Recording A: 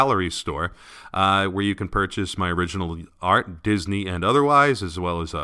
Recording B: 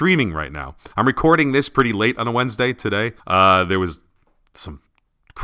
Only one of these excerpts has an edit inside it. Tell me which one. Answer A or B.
B